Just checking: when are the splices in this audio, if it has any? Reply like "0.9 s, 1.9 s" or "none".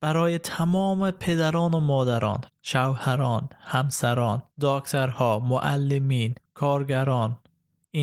2.5 s, 4.5 s, 6.4 s